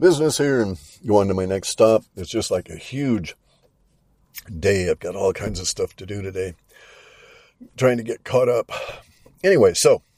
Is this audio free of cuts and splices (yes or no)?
yes